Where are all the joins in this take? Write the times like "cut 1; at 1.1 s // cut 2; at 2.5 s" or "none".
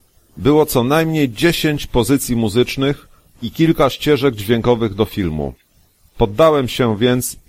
cut 1; at 6.1 s